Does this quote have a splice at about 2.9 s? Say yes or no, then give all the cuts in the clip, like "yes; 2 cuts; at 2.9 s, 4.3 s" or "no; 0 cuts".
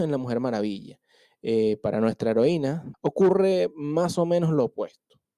yes; 1 cut; at 2.9 s